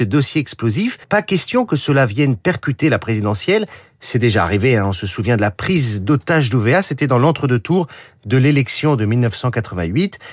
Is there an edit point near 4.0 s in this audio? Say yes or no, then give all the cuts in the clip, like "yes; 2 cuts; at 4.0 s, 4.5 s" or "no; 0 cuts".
no; 1 cut; at 1.0 s